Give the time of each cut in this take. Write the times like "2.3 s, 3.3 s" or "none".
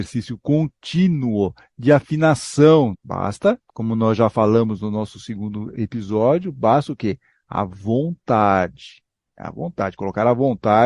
2.9 s